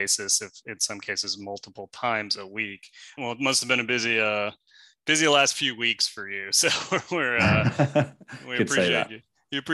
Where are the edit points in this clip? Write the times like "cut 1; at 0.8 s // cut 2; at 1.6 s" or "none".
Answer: cut 1; at 3.2 s